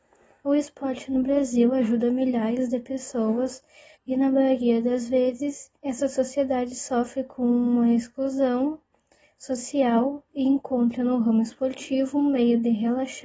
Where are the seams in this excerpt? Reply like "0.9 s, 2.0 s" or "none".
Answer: 3.9 s, 5.8 s